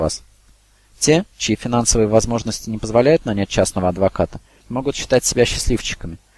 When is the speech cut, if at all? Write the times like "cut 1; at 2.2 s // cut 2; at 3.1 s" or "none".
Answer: none